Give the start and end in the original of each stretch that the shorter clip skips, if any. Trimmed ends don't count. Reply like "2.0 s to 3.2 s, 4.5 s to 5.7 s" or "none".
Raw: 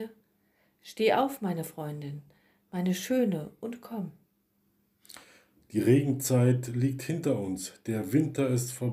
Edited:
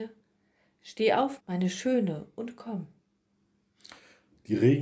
1.4 s to 2.6 s